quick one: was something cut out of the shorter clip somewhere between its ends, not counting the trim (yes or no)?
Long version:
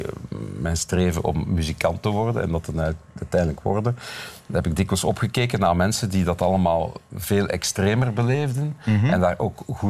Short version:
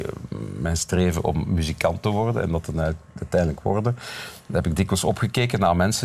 no